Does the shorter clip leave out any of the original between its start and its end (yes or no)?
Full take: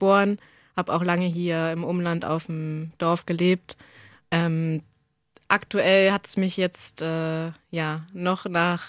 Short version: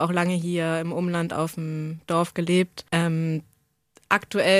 yes